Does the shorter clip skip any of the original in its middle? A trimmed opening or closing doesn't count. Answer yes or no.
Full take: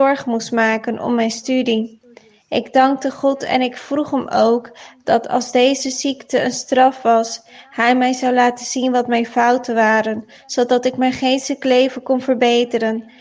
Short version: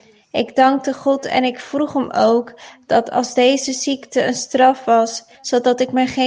yes